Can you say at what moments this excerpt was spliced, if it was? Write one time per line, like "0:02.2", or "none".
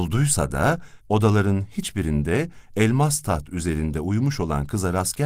0:01.0